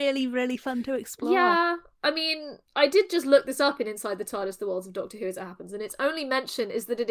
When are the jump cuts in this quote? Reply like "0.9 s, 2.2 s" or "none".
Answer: none